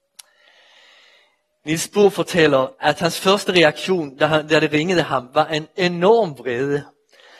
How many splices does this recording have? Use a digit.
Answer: 0